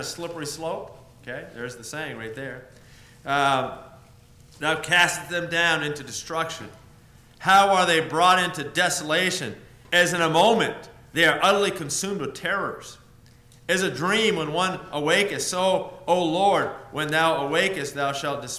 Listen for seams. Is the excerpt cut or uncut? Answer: uncut